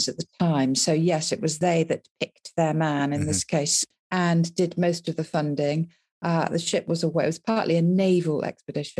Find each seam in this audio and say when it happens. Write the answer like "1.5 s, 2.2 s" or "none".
3.9 s